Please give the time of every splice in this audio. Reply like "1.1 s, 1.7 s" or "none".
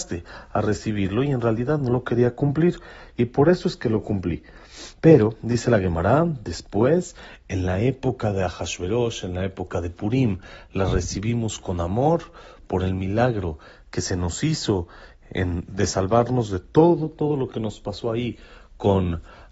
none